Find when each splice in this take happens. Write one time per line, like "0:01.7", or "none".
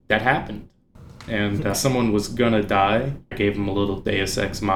0:01.7
0:03.3